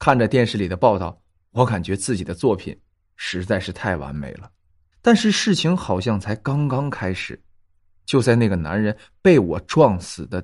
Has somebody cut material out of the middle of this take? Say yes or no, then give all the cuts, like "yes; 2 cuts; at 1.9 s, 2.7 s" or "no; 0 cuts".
yes; 1 cut; at 4.9 s